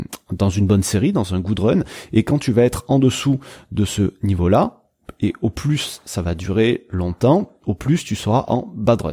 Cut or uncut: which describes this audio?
uncut